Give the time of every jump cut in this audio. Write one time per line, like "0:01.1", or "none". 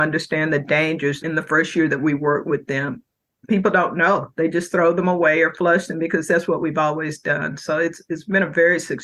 0:01.2